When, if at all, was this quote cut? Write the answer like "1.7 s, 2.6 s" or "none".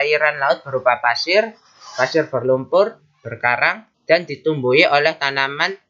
3.9 s